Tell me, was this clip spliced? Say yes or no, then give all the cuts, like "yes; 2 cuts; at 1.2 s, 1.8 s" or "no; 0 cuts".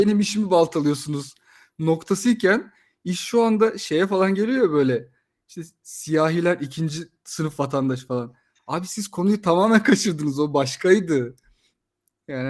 no; 0 cuts